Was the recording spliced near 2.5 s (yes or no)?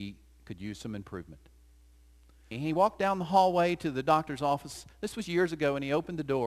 yes